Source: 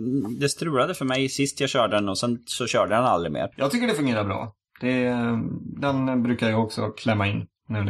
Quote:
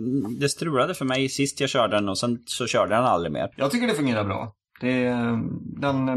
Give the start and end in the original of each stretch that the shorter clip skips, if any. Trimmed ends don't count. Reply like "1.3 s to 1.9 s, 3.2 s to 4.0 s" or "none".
none